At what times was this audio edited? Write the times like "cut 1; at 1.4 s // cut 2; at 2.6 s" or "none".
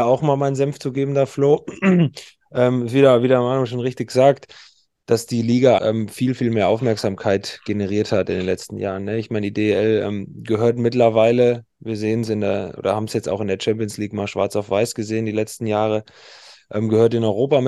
cut 1; at 5.8 s